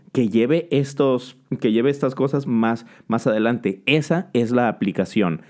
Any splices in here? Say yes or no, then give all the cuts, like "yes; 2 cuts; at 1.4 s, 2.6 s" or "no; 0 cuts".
no; 0 cuts